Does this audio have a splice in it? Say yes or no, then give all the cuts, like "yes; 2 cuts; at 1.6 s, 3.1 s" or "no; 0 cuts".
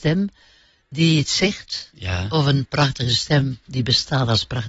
no; 0 cuts